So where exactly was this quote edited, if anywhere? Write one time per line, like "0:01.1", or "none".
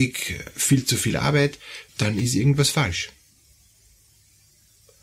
0:01.9